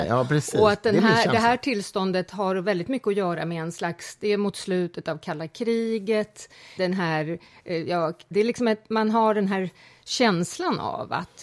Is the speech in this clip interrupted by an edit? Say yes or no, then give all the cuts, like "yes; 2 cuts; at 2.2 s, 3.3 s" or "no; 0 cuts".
yes; 2 cuts; at 6.8 s, 8.3 s